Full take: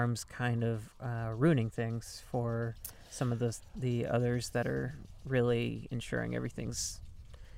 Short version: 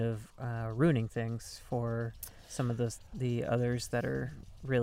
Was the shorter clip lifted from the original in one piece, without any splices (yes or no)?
yes